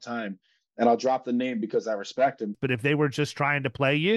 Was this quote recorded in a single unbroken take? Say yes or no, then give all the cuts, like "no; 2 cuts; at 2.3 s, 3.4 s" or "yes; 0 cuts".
no; 1 cut; at 2.5 s